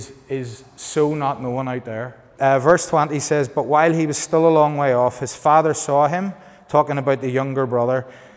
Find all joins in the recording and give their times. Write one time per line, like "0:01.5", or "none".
0:02.4